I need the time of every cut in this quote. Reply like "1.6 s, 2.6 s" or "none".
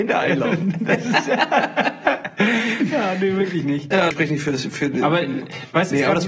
4.1 s